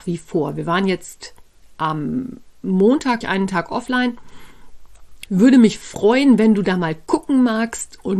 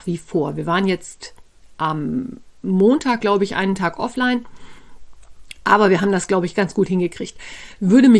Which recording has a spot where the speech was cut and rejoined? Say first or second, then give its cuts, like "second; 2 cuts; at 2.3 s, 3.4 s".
first; 2 cuts; at 3.2 s, 5.3 s